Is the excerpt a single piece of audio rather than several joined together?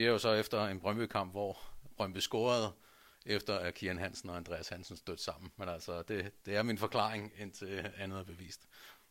yes; 0 cuts

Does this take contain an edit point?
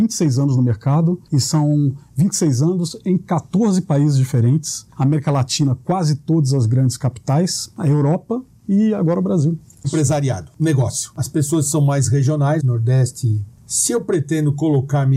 yes; 3 cuts; at 9.8 s, 11.1 s, 12.6 s

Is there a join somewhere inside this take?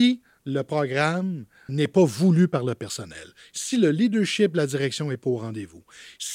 yes; 1 cut; at 1.7 s

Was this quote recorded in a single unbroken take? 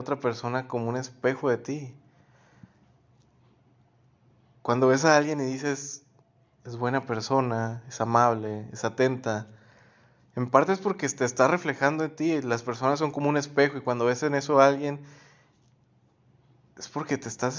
yes; 0 cuts

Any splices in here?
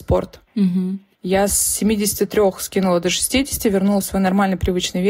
yes; 1 cut; at 1.1 s

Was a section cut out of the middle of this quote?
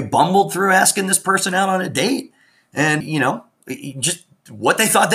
yes; 1 cut; at 3.0 s

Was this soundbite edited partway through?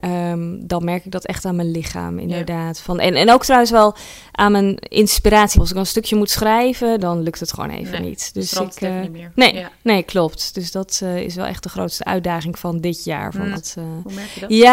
yes; 2 cuts; at 5.5 s, 13.5 s

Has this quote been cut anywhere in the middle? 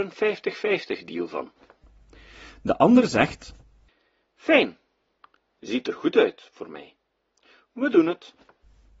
no; 0 cuts

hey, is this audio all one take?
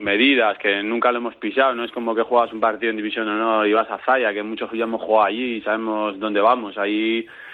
yes; 0 cuts

